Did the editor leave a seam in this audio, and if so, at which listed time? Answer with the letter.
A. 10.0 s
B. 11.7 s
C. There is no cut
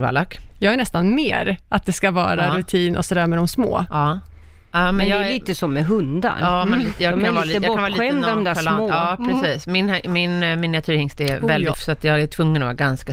B